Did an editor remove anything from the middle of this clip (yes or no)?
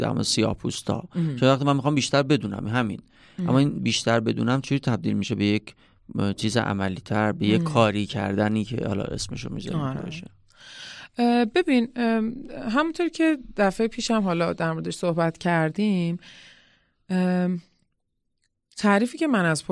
no